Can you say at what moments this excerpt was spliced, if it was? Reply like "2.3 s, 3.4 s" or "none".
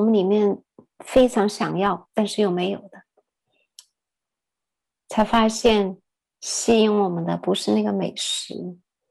4.9 s